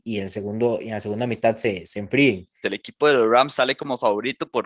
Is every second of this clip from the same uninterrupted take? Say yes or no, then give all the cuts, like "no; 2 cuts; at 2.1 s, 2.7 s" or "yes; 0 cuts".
no; 1 cut; at 2.6 s